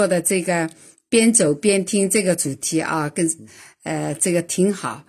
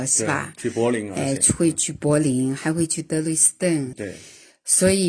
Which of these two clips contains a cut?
second; 1 cut; at 3.9 s

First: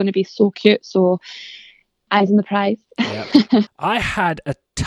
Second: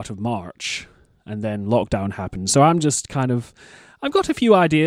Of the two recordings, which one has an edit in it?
first; 2 cuts; at 2.1 s, 3.7 s

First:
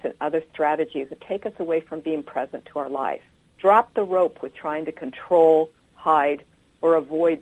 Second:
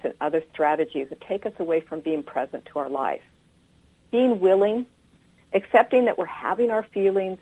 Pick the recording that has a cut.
first; 1 cut; at 3.5 s

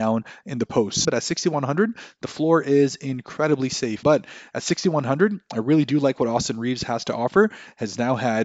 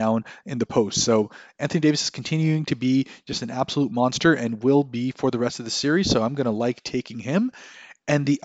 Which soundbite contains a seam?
first; 2 cuts; at 1.0 s, 4.0 s

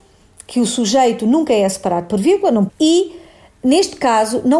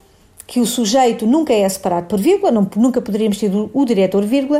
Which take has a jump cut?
first; 1 cut; at 2.7 s

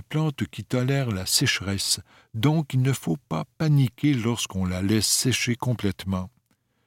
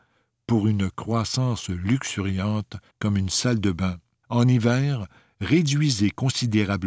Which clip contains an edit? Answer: second; 2 cuts; at 2.9 s, 4.2 s

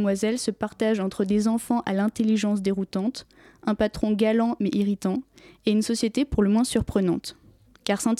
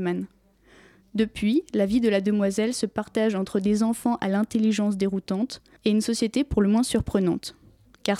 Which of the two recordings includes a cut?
second; 1 cut; at 5.8 s

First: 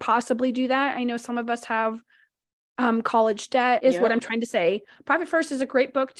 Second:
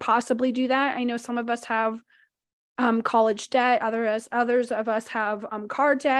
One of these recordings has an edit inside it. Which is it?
first; 1 cut; at 3.8 s

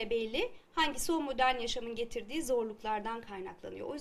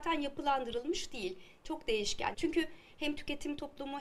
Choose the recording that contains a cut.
second; 1 cut; at 2.3 s

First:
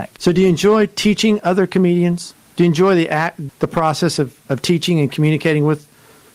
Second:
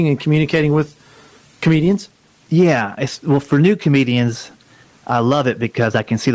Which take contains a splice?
first; 1 cut; at 3.5 s

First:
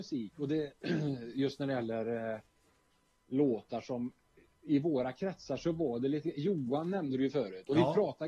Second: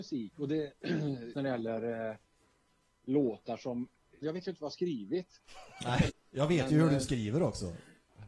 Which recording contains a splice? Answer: second; 3 cuts; at 1.3 s, 4.2 s, 6.1 s

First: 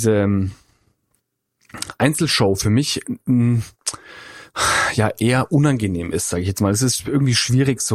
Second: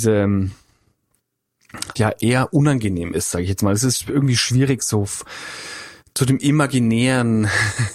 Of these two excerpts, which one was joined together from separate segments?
second; 1 cut; at 2.0 s

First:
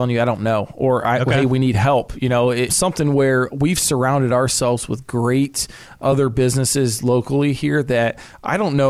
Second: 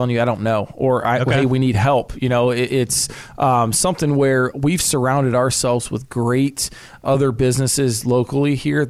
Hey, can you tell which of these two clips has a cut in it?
first; 1 cut; at 2.7 s

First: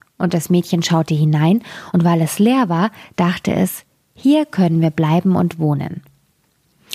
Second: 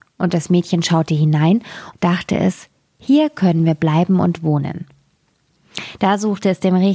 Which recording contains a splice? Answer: second; 1 cut; at 1.9 s

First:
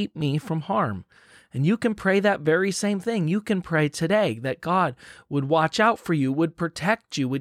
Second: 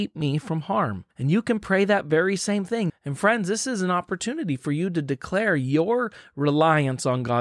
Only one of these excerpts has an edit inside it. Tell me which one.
second; 2 cuts; at 1.1 s, 2.9 s

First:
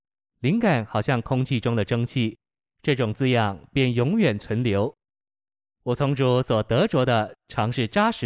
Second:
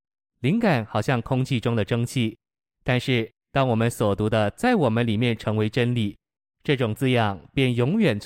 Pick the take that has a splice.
first; 1 cut; at 2.7 s

